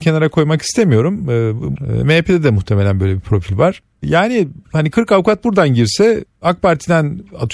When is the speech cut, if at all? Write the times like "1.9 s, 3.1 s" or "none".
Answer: 1.8 s